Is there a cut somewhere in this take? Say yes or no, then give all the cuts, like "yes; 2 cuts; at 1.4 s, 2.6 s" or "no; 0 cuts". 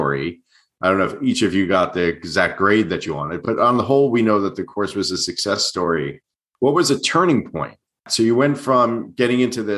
no; 0 cuts